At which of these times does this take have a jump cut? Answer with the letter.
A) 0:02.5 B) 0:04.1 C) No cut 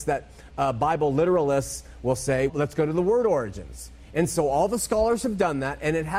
A